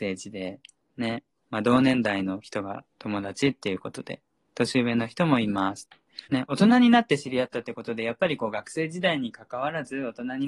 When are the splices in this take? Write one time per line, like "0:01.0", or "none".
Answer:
0:02.9
0:06.2